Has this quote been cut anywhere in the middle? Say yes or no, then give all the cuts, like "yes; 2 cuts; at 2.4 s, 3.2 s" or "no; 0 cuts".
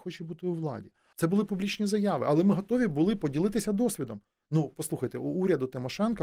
yes; 1 cut; at 1.1 s